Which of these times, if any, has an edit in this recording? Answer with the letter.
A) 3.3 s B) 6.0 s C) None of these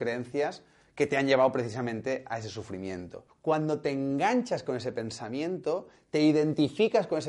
A